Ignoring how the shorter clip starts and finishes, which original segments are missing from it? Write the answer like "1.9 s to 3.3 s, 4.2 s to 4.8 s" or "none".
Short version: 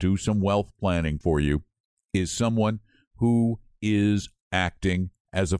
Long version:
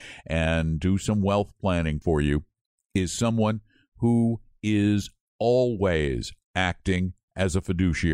5.2 s to 6.4 s